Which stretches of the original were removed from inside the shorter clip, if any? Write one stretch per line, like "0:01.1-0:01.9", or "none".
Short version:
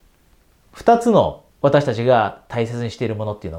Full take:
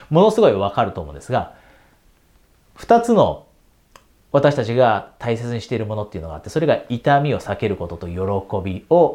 0:03.5-0:04.2